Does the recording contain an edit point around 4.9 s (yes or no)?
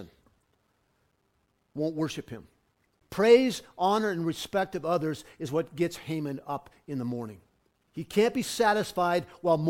no